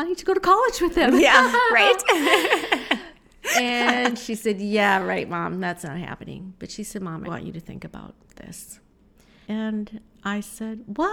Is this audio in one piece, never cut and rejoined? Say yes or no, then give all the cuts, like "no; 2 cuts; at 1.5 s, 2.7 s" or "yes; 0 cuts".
no; 2 cuts; at 7.2 s, 9.4 s